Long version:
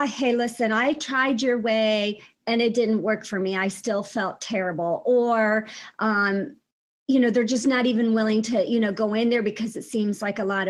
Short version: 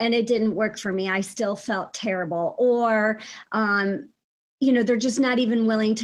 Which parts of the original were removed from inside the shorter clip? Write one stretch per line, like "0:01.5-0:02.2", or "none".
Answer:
none